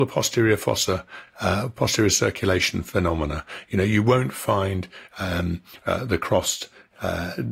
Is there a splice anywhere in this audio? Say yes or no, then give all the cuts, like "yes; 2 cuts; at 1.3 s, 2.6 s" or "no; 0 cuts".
no; 0 cuts